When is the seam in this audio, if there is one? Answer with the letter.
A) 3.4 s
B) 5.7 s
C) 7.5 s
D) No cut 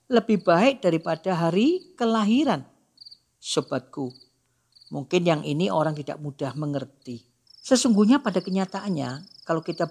C